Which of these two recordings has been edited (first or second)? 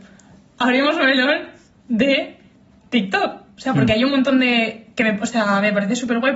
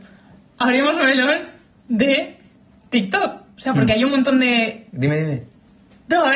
second